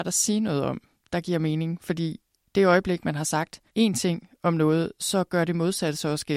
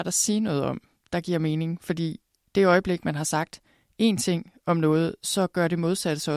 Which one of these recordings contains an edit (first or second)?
first